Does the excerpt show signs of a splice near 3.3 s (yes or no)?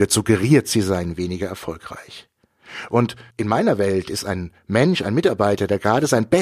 yes